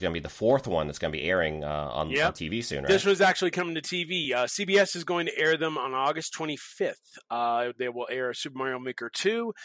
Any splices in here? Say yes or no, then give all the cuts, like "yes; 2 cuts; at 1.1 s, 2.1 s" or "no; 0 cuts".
no; 0 cuts